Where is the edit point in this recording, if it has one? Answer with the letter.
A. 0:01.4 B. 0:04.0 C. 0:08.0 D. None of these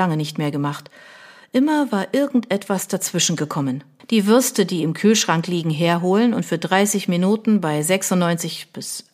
B